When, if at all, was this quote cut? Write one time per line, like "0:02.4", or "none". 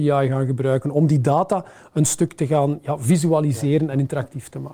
none